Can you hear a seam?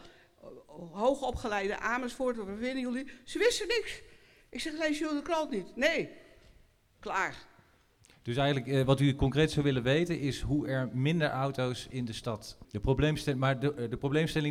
yes; 1 cut; at 12.6 s

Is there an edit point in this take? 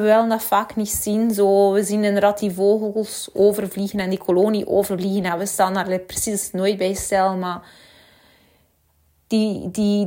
yes; 1 cut; at 2.4 s

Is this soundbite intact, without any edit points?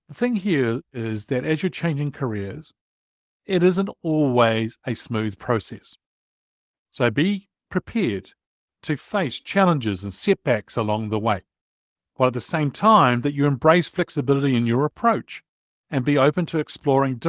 yes; 0 cuts

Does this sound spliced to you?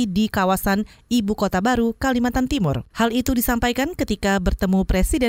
yes; 1 cut; at 2.9 s

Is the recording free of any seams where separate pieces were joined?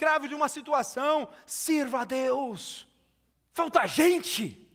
no; 1 cut; at 3.3 s

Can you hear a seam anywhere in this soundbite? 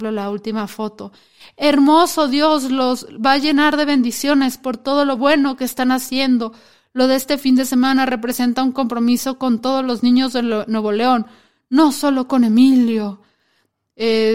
no; 0 cuts

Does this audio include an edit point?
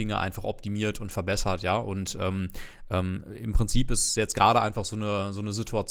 no; 0 cuts

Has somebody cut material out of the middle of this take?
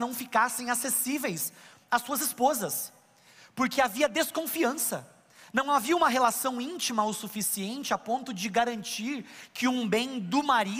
no; 0 cuts

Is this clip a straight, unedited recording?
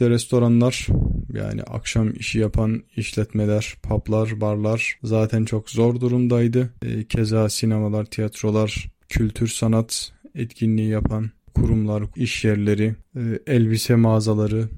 no; 2 cuts; at 6.8 s, 12.1 s

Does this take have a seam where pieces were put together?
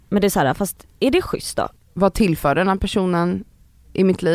yes; 1 cut; at 1.8 s

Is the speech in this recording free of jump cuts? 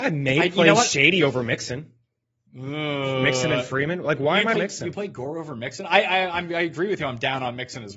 no; 1 cut; at 4.5 s

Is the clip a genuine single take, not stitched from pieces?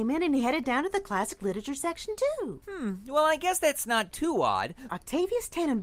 no; 1 cut; at 4.9 s

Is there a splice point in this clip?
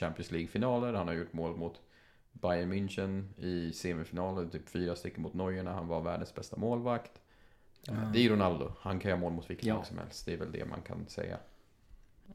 no; 0 cuts

